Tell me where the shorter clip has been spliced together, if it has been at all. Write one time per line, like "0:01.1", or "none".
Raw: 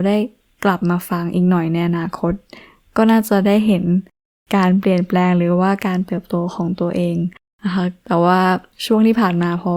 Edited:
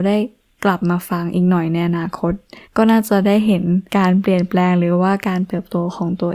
0:02.6
0:03.9